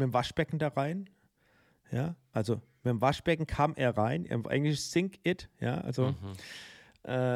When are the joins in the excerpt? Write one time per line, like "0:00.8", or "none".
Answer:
none